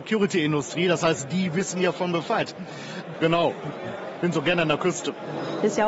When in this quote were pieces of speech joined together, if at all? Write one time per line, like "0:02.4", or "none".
0:03.1